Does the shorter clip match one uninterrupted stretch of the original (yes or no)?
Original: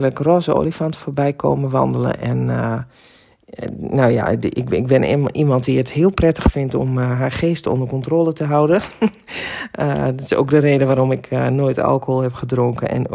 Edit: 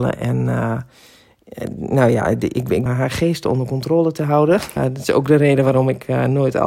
no